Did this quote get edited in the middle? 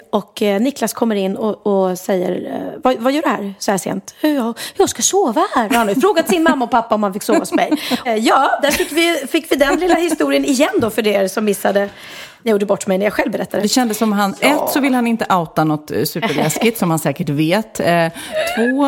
yes; 2 cuts; at 8.0 s, 13.6 s

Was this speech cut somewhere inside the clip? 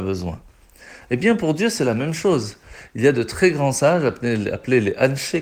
yes; 1 cut; at 1.0 s

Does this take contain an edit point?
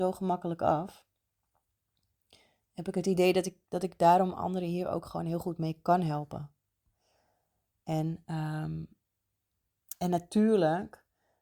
no; 0 cuts

